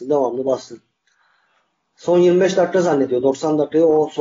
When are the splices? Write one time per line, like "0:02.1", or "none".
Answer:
none

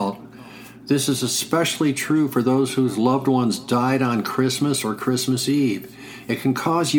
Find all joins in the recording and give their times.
none

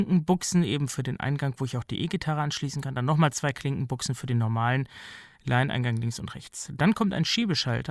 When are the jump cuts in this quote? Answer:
none

